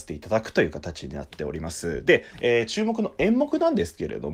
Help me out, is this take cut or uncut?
uncut